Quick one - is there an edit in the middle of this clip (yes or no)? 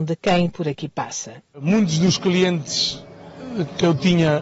yes